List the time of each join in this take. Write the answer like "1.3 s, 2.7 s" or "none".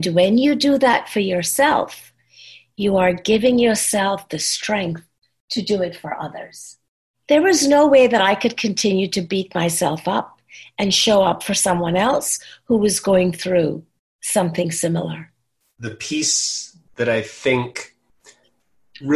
15.8 s